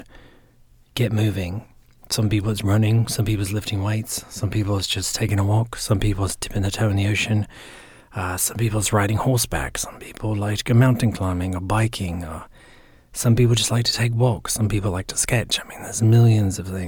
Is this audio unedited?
yes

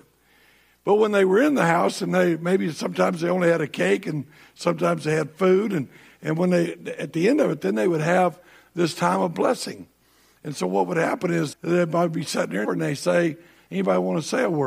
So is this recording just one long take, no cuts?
no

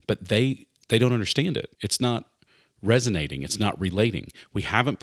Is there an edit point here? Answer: yes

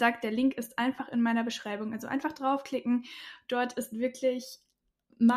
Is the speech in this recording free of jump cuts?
yes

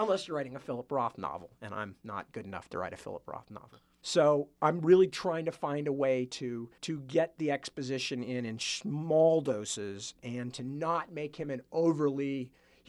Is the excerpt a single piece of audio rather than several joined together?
no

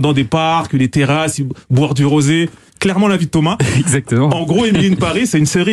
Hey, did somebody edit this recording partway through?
no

